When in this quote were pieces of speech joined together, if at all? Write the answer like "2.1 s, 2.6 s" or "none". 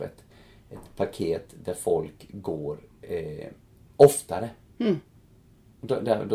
none

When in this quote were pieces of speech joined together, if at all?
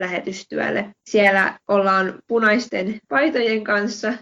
1.0 s

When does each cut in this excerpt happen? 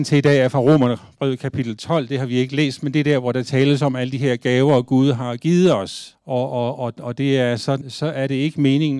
6.1 s, 7.8 s

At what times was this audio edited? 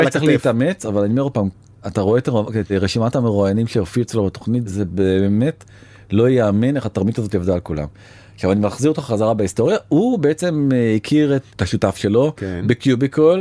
none

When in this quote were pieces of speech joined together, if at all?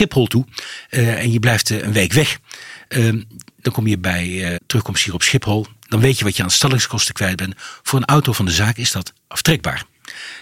4.6 s

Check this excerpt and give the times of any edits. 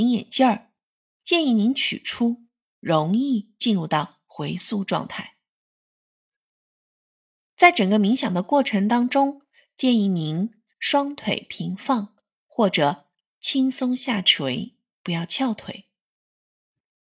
2.6 s

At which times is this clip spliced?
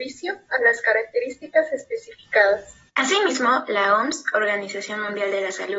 2.9 s

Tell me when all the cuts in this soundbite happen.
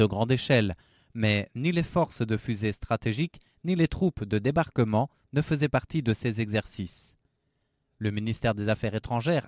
none

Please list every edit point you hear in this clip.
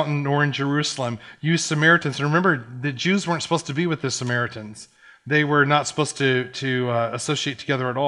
none

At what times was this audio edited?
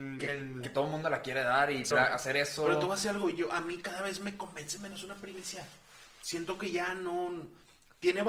1.9 s

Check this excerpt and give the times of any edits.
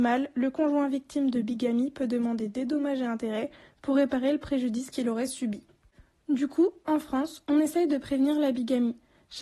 none

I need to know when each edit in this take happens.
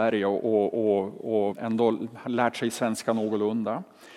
1.5 s

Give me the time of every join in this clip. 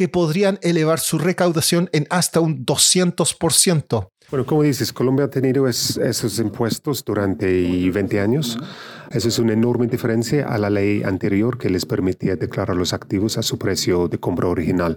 4.3 s, 9.1 s

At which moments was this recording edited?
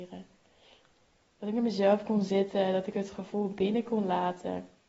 none

